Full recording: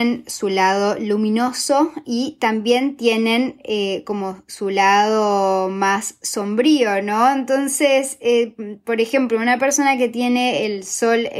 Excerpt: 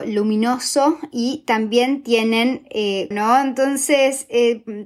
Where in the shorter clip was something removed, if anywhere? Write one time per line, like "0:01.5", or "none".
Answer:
0:03.1